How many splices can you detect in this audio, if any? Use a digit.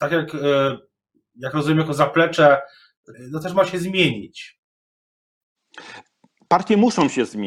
1